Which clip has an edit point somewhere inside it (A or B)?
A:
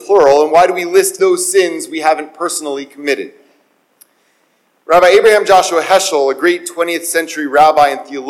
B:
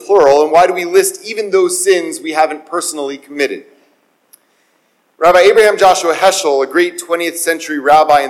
A